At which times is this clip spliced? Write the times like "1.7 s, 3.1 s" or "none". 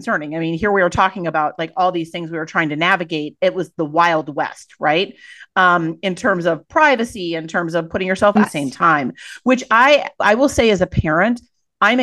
8.4 s